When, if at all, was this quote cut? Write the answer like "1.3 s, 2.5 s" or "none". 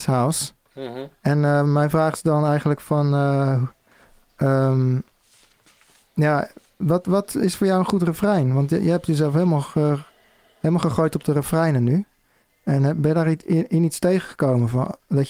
none